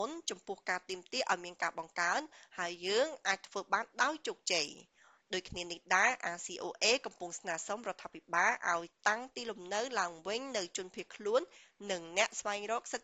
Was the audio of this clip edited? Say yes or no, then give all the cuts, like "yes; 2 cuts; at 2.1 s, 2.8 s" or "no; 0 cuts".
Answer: no; 0 cuts